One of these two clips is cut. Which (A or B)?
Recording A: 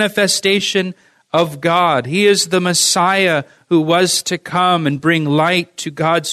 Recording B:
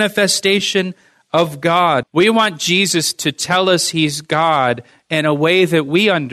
B